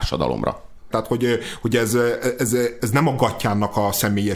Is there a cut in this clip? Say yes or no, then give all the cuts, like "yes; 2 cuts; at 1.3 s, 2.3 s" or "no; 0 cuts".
yes; 2 cuts; at 0.9 s, 2.8 s